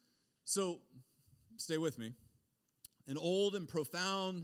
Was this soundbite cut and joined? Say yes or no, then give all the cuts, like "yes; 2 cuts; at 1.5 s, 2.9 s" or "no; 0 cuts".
no; 0 cuts